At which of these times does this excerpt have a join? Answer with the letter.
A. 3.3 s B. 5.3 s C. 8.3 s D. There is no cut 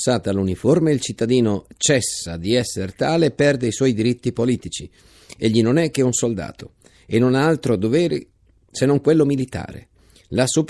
D